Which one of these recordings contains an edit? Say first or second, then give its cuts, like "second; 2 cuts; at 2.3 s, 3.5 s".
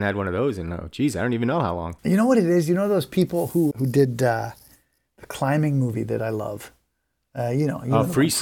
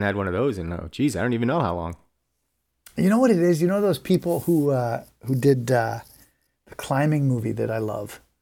first; 2 cuts; at 2.0 s, 3.7 s